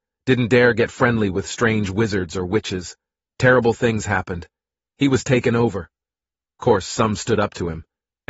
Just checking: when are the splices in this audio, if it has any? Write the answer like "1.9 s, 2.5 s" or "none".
none